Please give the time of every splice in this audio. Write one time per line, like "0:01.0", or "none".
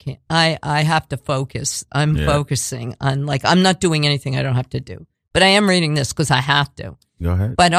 none